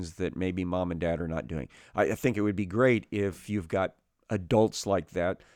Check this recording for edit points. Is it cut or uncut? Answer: uncut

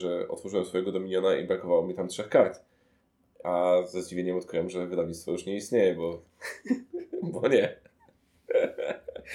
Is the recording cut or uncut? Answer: uncut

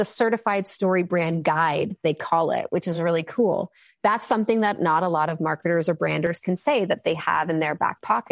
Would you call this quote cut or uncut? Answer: uncut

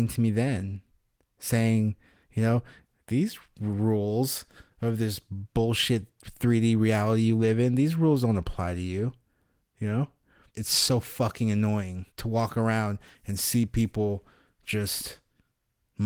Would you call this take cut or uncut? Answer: cut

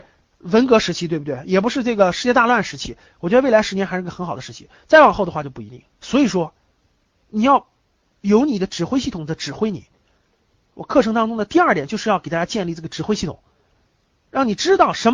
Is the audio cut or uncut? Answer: cut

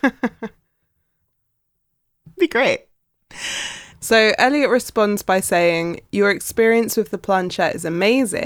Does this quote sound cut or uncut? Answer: cut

